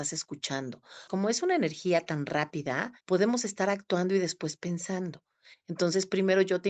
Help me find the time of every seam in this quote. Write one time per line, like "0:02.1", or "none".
0:01.1
0:03.0